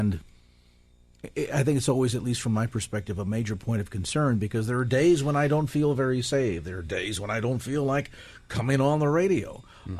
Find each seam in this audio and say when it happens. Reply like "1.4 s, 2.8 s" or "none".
none